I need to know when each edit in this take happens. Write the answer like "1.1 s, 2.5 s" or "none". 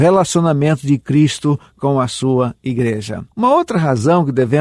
3.3 s